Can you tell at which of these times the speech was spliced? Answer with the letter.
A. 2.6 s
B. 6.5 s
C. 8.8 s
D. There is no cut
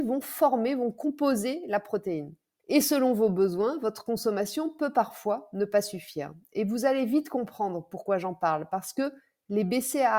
A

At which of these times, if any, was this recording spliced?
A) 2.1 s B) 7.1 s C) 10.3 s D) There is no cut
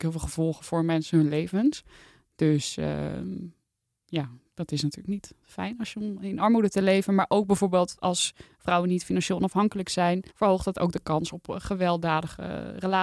C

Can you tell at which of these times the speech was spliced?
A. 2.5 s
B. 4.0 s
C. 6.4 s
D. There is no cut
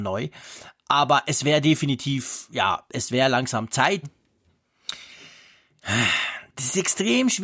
B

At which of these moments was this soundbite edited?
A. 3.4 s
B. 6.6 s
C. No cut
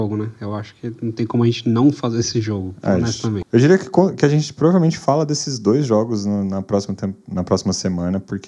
A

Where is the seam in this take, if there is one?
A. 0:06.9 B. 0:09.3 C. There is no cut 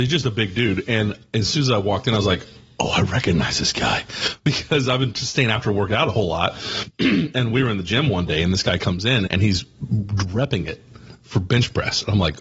B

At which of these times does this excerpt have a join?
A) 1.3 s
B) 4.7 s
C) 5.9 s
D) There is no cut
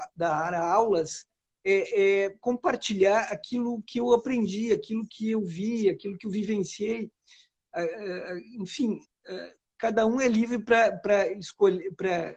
D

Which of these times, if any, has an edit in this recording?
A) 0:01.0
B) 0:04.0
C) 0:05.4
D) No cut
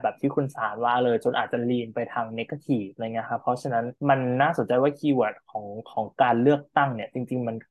B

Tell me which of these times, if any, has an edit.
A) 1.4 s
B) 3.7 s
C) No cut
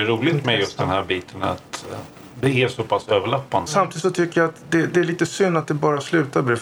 B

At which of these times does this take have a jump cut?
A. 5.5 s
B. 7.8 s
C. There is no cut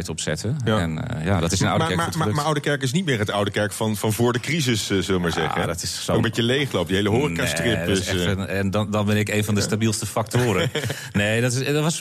C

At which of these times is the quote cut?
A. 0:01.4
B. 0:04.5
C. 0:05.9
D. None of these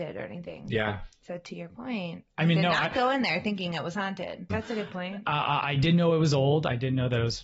B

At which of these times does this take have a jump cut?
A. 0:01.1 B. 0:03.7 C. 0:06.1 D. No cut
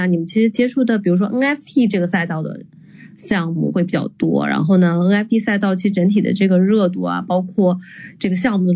B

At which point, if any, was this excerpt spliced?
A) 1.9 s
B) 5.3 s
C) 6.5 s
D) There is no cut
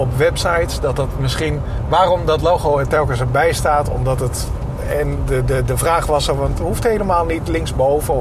C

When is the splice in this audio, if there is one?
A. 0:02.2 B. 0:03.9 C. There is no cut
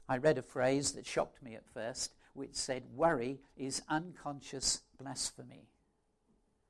C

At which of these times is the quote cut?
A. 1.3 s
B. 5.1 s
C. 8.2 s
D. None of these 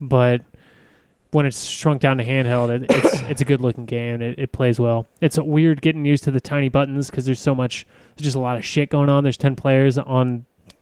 C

